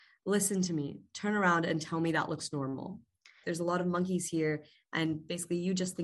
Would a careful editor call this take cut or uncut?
cut